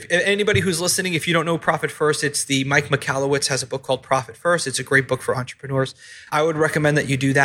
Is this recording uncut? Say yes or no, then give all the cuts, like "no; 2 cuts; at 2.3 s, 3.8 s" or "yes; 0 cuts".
yes; 0 cuts